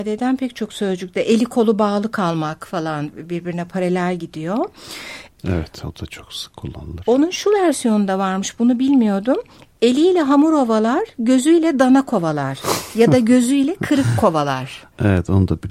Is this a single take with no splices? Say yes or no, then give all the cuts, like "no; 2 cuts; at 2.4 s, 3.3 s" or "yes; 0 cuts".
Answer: no; 1 cut; at 5.3 s